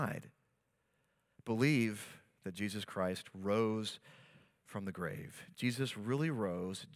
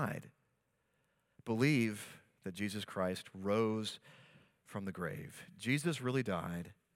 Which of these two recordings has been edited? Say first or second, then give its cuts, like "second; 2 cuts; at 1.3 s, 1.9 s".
first; 1 cut; at 5.5 s